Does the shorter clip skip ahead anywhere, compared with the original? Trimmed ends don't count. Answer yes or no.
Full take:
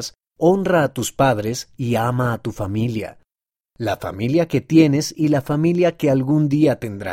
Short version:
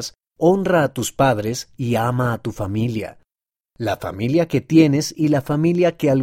no